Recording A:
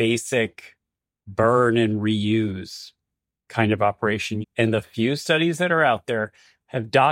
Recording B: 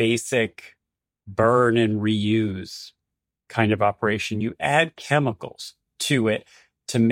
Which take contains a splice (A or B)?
A